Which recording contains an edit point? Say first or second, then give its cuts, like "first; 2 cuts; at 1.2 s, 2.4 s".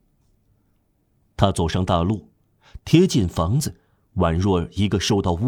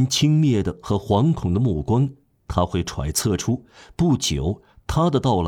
first; 1 cut; at 2.8 s